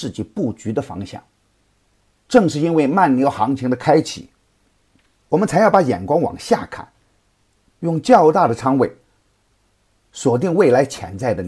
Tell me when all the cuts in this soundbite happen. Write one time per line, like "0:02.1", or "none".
0:07.7